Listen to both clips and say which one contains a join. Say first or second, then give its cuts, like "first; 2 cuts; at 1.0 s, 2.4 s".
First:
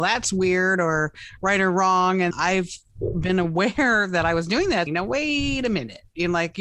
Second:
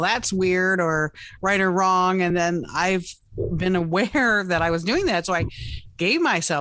first; 2 cuts; at 2.3 s, 4.9 s